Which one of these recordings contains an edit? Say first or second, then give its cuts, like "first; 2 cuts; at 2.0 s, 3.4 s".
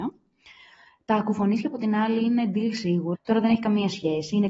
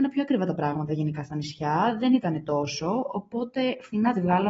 first; 1 cut; at 3.1 s